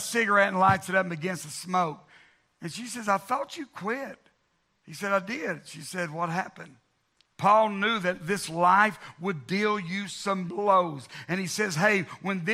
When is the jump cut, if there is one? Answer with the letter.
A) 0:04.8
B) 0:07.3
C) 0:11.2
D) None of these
B